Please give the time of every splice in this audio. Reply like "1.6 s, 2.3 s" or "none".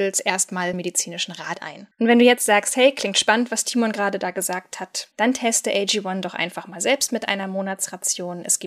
5.1 s